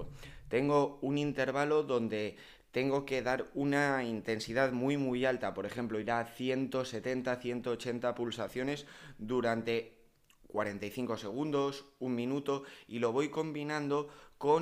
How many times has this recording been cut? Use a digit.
0